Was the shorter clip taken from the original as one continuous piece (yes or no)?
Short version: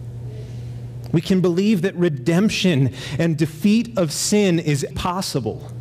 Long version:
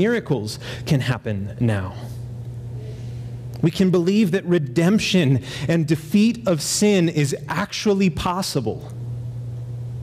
no